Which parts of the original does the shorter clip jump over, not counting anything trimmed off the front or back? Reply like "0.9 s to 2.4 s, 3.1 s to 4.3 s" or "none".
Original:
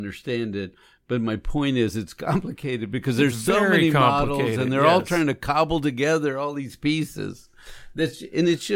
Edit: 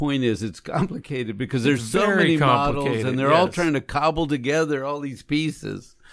none

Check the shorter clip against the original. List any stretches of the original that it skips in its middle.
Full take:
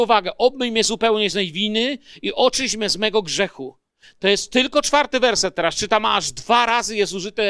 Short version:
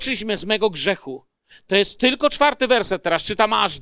none

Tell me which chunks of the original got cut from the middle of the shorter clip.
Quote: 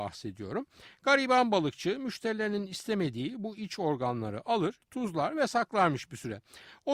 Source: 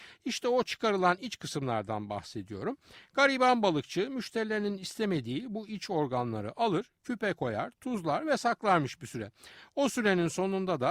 6.9 s to 7.7 s

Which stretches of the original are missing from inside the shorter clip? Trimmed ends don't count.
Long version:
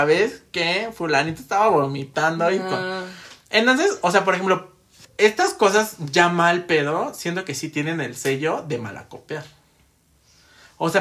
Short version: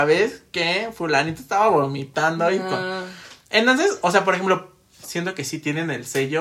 5.0 s to 7.1 s

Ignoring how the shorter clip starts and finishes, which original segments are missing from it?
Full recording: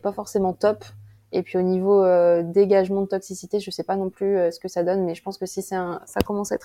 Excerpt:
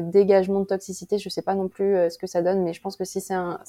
none

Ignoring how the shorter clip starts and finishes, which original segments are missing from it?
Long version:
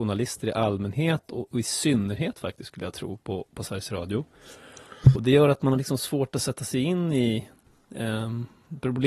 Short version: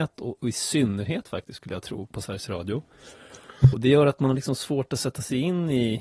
3.2 s to 3.5 s

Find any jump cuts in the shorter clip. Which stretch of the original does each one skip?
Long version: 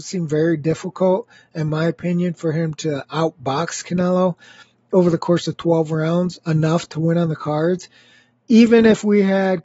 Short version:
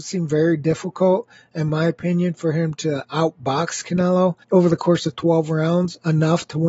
4.4 s to 4.8 s

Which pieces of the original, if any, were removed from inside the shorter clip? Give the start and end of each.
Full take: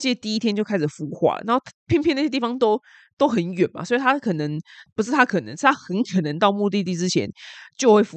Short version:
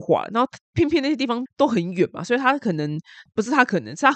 2.6 s to 3.1 s

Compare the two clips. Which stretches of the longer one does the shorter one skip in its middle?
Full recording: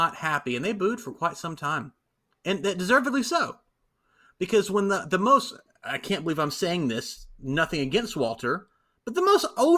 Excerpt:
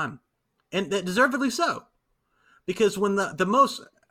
none

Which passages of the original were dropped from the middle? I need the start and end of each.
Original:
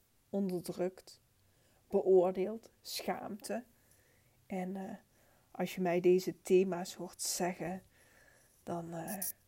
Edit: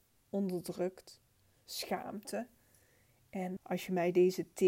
1.6 s to 2.8 s, 4.7 s to 5.5 s

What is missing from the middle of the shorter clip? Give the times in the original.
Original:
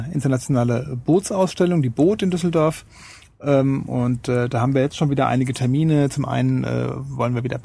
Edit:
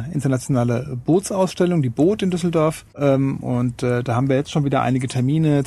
2.9 s to 3.3 s

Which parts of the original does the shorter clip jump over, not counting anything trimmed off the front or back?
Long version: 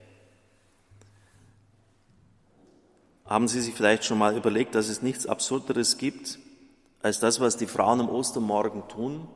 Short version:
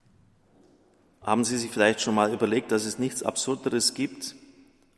none

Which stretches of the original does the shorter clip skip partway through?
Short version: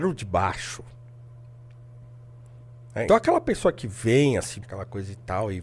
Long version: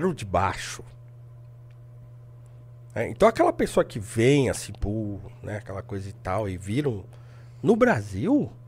3.1 s to 3.2 s, 4.7 s to 5.6 s

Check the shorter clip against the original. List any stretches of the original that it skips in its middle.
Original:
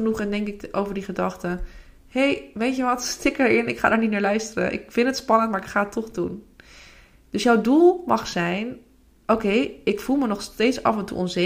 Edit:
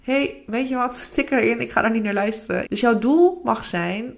4.7 s to 7.3 s

